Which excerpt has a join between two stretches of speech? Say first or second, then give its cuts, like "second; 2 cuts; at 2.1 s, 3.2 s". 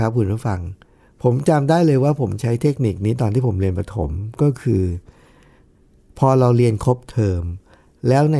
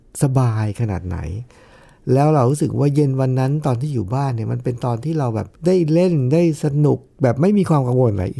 second; 1 cut; at 5.6 s